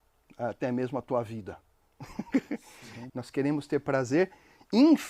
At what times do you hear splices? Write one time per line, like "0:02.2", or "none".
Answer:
0:03.1